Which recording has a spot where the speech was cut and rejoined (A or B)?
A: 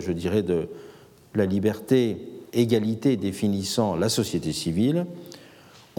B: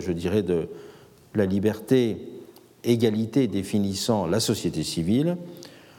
A